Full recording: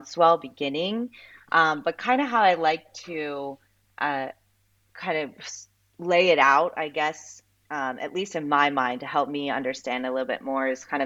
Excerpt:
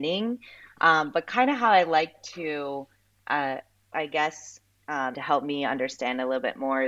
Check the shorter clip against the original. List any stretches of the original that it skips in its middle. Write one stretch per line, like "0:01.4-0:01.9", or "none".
0:04.6-0:06.7
0:08.0-0:09.0